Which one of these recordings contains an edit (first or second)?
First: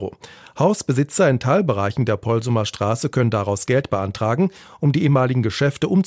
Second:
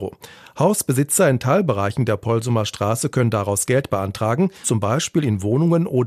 second